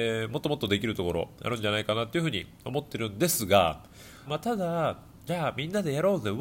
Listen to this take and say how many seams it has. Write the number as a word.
two